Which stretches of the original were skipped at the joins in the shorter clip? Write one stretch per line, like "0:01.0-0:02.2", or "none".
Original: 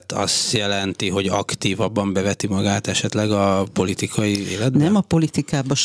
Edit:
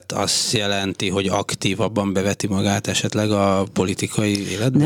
none